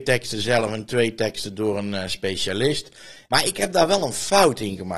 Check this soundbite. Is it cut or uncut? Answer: cut